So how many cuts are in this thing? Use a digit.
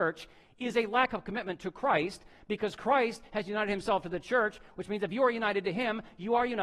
0